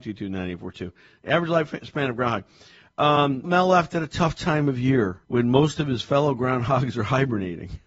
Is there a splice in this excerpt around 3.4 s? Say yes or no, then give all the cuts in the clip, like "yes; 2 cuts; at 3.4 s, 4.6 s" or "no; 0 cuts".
yes; 2 cuts; at 3.4 s, 5.2 s